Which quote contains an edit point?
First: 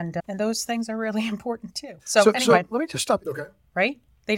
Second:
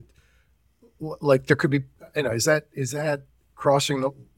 first; 2 cuts; at 2.0 s, 3.2 s

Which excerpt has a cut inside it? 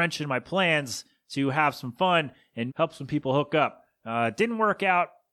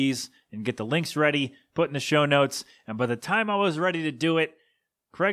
first; 1 cut; at 2.7 s

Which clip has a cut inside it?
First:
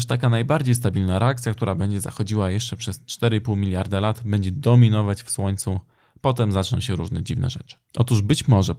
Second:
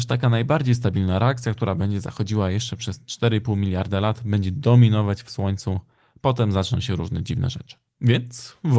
first; 1 cut; at 7.9 s

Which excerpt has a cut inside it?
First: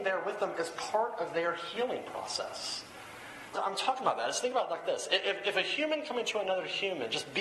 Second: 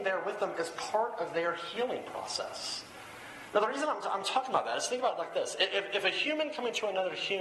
first; 1 cut; at 3.5 s

